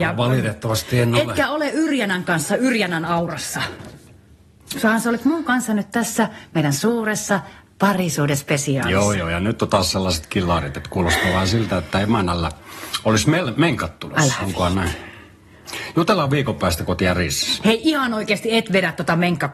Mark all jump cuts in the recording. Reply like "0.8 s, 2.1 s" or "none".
none

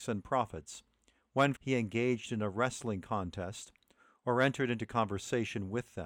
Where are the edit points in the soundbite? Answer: 1.5 s

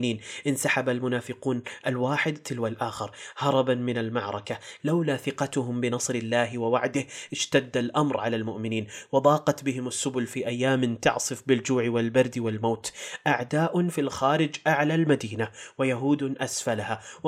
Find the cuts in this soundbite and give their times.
4.8 s

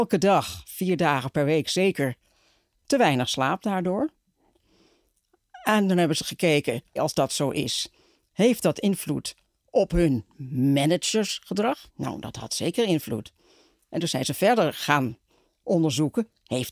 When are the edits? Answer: 7.0 s, 11.9 s

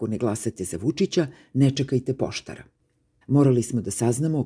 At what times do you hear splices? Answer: 3.2 s

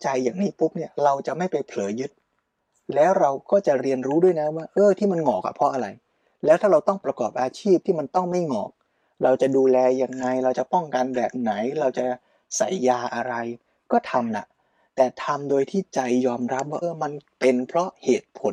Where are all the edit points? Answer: 16.8 s

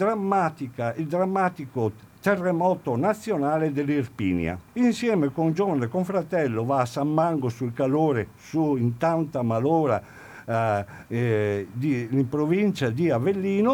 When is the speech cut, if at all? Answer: 4.7 s

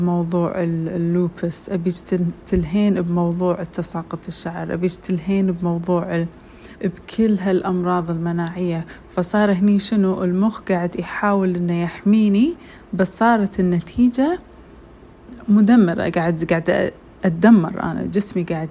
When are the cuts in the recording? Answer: 6.8 s

